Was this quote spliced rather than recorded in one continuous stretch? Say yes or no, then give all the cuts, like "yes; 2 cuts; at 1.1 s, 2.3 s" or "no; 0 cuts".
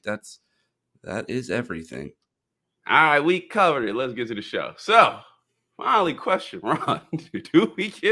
no; 0 cuts